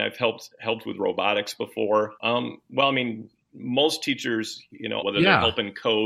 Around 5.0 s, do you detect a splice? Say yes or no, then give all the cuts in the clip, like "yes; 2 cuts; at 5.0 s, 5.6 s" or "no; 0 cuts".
yes; 2 cuts; at 2.2 s, 5.0 s